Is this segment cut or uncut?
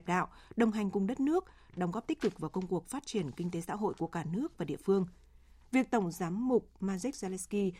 cut